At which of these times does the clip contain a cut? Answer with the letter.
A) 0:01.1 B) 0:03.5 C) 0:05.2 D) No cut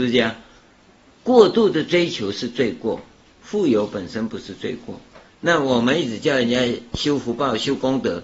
A